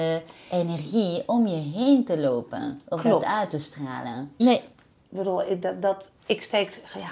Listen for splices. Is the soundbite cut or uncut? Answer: cut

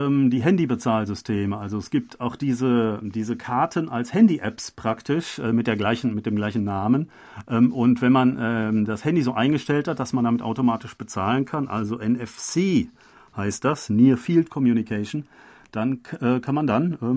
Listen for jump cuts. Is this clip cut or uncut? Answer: uncut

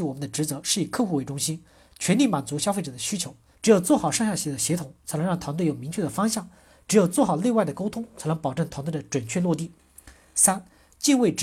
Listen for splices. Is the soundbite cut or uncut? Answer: cut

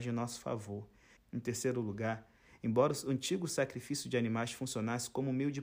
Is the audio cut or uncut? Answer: cut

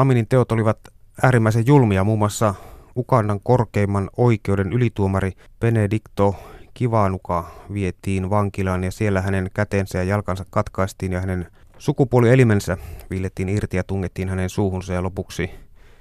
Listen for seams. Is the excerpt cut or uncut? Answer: uncut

